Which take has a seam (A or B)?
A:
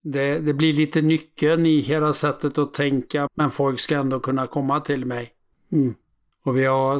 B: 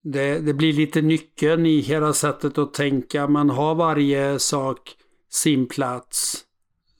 A